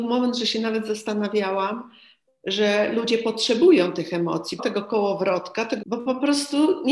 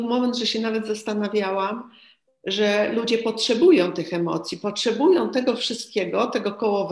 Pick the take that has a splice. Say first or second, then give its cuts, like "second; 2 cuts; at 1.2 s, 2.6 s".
first; 2 cuts; at 4.6 s, 5.8 s